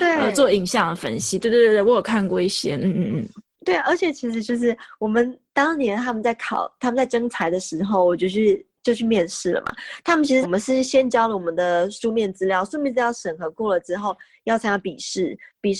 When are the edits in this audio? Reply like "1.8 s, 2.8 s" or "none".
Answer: 10.4 s